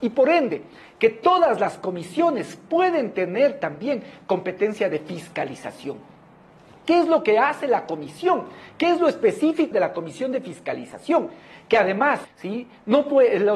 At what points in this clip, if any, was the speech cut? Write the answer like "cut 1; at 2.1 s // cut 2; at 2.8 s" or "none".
cut 1; at 9.7 s // cut 2; at 12.2 s